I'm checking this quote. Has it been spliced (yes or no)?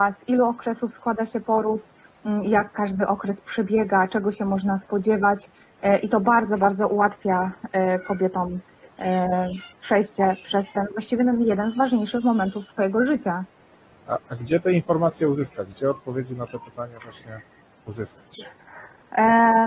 no